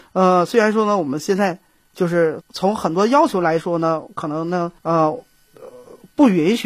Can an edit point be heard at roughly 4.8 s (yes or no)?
yes